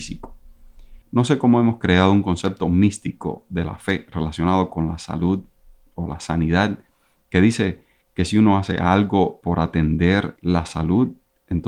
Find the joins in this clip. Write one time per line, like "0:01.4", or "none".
0:01.0